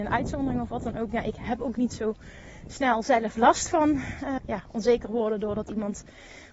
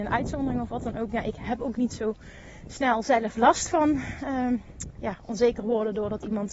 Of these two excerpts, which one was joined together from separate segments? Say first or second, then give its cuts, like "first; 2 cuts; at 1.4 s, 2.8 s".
first; 1 cut; at 4.4 s